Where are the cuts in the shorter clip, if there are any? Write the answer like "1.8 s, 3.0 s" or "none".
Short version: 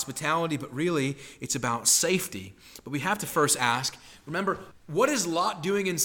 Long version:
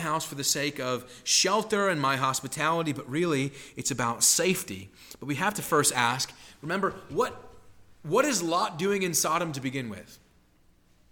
4.7 s